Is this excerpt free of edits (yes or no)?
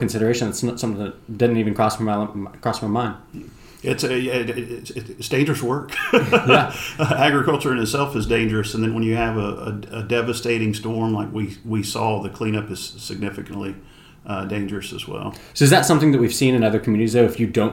yes